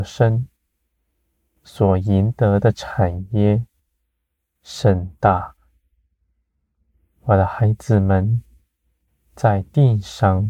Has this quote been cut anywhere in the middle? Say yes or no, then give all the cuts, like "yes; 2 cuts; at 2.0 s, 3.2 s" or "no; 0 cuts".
no; 0 cuts